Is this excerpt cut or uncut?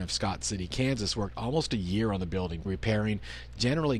cut